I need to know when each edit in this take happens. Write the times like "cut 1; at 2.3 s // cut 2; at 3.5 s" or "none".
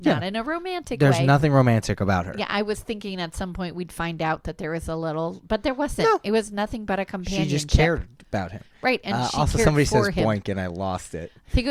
none